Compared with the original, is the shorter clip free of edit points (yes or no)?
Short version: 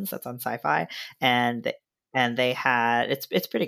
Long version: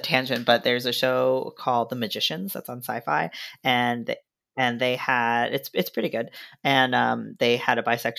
yes